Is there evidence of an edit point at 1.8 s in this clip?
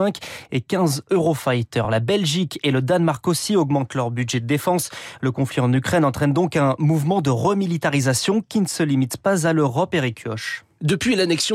no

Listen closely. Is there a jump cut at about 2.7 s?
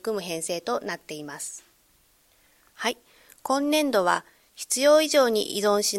yes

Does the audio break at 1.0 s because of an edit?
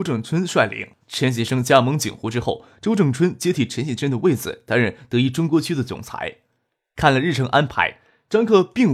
yes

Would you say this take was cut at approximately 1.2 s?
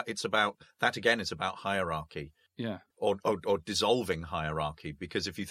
no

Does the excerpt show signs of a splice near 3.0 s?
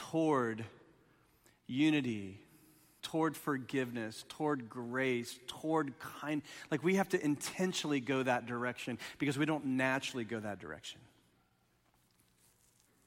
yes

